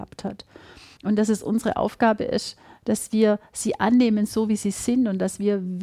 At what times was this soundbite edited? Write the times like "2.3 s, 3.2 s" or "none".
1.0 s